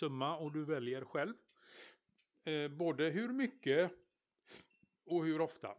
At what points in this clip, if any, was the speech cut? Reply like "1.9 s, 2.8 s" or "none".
none